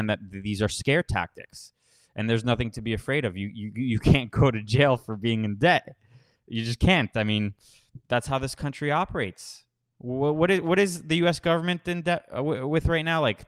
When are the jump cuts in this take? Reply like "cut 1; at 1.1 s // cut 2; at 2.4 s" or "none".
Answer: none